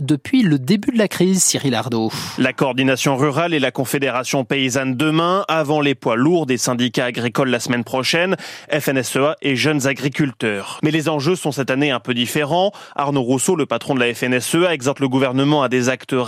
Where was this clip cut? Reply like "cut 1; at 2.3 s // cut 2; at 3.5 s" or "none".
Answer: cut 1; at 10.8 s

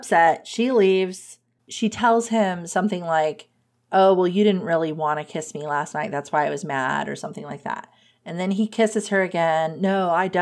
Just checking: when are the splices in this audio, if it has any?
cut 1; at 1.6 s

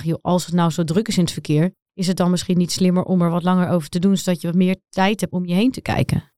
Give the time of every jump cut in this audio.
cut 1; at 5.3 s

